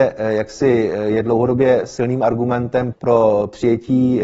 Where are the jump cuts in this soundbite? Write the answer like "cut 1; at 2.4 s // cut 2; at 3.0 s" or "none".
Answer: cut 1; at 2.9 s